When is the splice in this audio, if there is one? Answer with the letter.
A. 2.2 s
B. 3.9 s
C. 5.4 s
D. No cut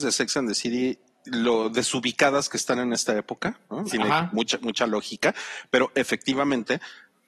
B